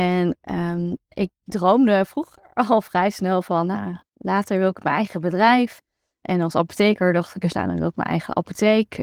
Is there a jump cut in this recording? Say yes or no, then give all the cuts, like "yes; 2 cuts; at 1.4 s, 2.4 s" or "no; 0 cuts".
no; 0 cuts